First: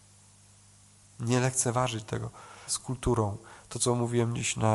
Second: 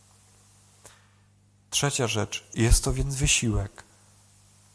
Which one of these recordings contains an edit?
first; 1 cut; at 2.7 s

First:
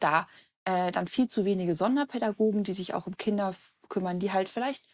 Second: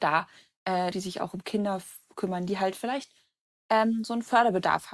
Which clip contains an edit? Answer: second; 1 cut; at 0.9 s

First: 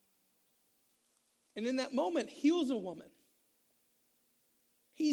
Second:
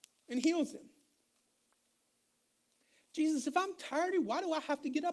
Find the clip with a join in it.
second; 1 cut; at 4.1 s

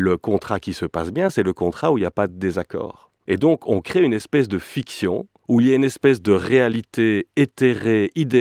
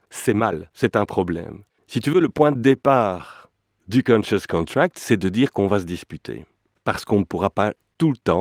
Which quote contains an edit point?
second; 1 cut; at 1.8 s

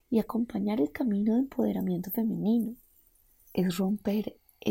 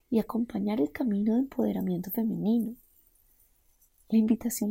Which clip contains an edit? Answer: first; 1 cut; at 3.4 s

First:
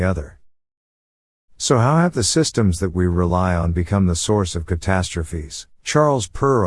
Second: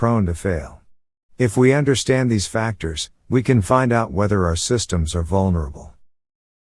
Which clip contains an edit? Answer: first; 1 cut; at 5.7 s

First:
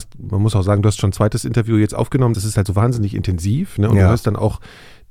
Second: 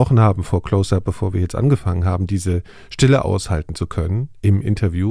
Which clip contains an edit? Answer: first; 1 cut; at 2.3 s

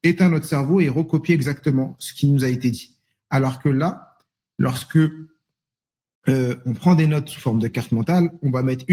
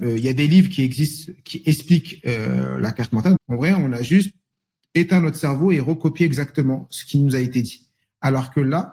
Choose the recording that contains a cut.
second; 1 cut; at 3.4 s

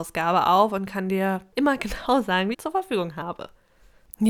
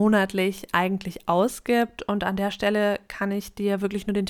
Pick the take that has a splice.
first; 1 cut; at 2.5 s

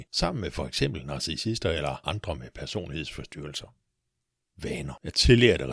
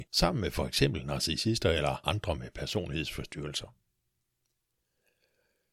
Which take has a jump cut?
first; 1 cut; at 4.4 s

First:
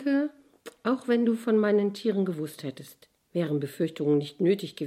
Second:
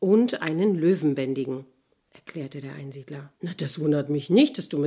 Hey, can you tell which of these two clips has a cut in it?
second; 1 cut; at 3.4 s

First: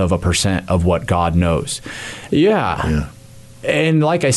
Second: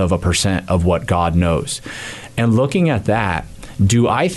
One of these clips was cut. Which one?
first; 1 cut; at 2.3 s

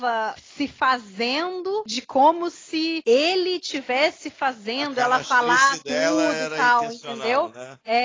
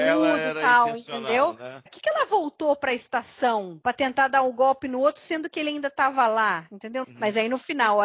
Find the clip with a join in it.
second; 2 cuts; at 1.9 s, 7.0 s

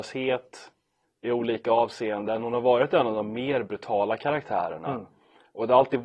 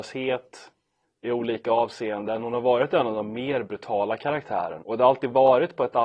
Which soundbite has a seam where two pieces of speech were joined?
second; 1 cut; at 4.8 s

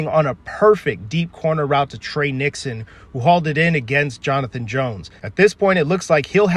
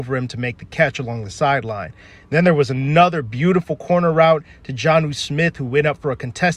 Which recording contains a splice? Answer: first; 1 cut; at 5.2 s

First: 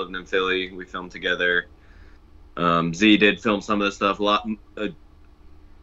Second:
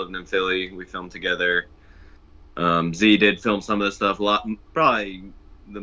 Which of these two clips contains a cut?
second; 1 cut; at 4.7 s

